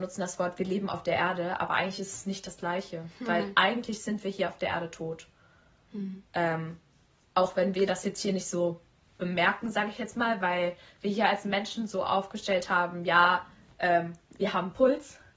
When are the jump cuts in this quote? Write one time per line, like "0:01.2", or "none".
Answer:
none